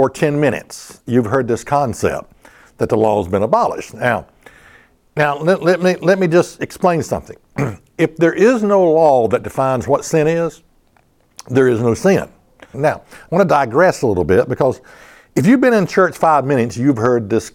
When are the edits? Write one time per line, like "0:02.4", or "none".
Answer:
0:12.7

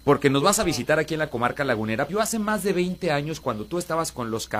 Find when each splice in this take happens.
0:02.1

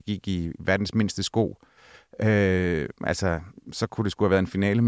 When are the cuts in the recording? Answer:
none

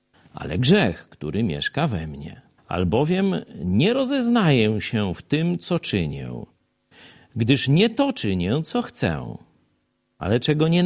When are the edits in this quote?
0:02.6

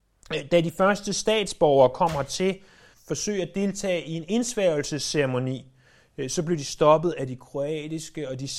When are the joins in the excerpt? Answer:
0:02.9

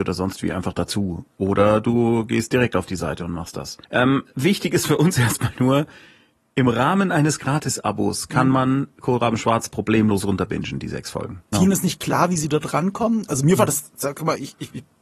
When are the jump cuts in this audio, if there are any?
0:03.8
0:11.5

